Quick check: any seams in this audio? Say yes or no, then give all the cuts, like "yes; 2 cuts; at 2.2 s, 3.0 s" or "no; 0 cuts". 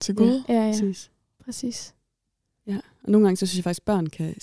no; 0 cuts